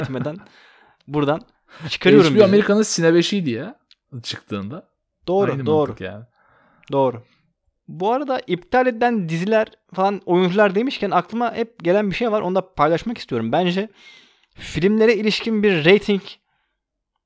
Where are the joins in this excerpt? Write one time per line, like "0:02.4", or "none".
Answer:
none